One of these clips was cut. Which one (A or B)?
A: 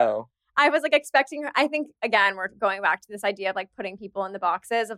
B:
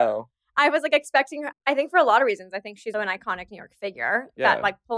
B